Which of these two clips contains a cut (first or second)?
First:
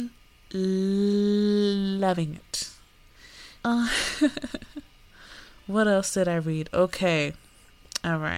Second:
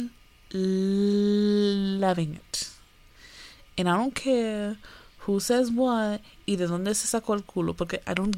first